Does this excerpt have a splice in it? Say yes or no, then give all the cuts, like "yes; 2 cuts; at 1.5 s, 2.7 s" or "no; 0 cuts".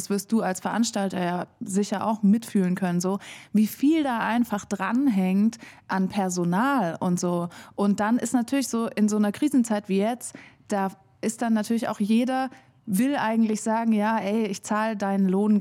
no; 0 cuts